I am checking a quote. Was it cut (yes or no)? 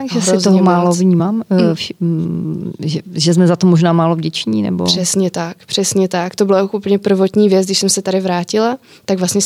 no